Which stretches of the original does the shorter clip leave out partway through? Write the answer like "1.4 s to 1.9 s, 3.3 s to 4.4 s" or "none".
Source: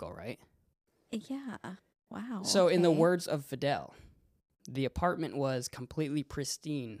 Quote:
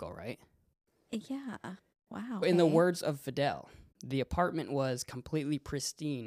2.4 s to 2.7 s, 4.2 s to 4.6 s